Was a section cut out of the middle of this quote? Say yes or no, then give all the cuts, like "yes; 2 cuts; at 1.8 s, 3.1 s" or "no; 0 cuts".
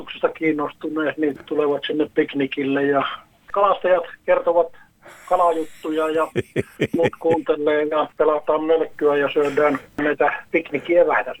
yes; 1 cut; at 8.1 s